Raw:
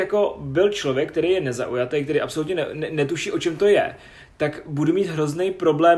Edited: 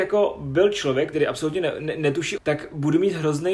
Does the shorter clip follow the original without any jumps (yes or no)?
no